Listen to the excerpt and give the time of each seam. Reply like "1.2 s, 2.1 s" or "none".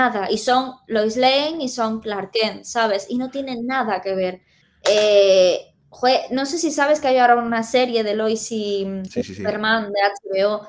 4.6 s, 9.1 s